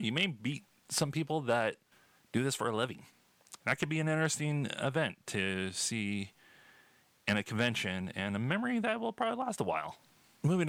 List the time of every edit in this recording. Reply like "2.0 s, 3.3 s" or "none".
none